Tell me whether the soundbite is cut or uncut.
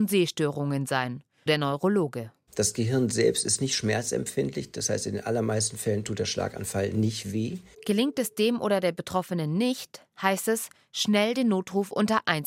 cut